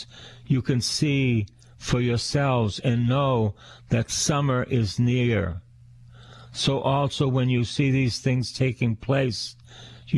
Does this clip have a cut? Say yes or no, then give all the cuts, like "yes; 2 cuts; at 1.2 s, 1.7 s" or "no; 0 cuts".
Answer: no; 0 cuts